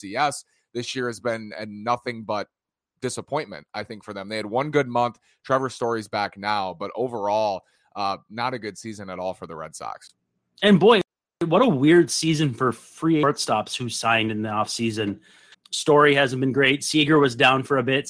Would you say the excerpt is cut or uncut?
cut